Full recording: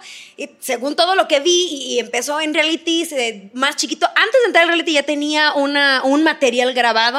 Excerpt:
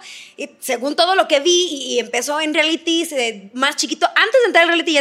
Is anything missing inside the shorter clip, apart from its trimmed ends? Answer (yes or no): no